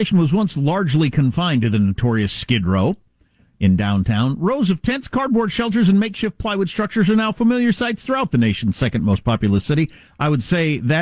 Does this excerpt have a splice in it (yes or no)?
no